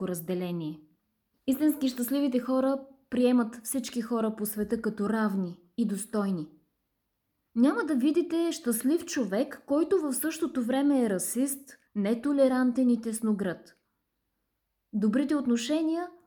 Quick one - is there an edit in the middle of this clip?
yes; 2 cuts; at 1.3 s, 11.9 s

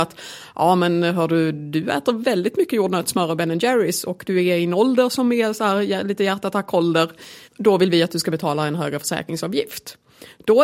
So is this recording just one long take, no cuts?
no; 1 cut; at 7.4 s

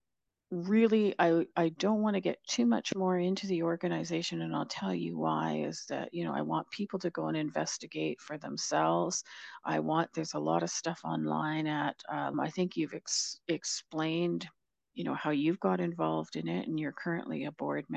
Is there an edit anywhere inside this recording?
yes; 1 cut; at 12.3 s

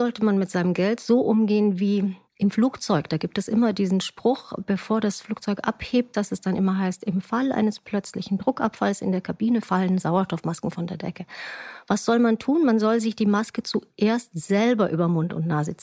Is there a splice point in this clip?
yes; 1 cut; at 2.2 s

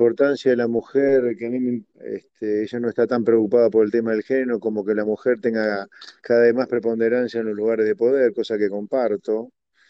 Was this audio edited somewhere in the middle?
yes; 1 cut; at 1.9 s

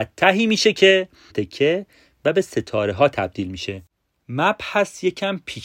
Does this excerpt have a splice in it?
yes; 1 cut; at 1.3 s

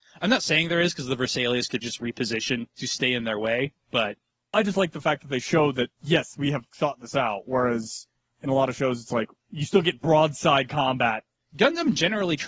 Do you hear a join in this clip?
yes; 1 cut; at 1.8 s

